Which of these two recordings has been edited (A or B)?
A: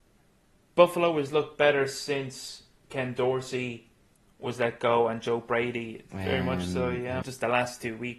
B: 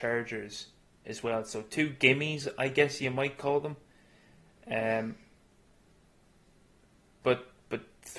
A